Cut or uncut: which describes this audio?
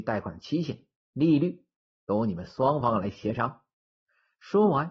uncut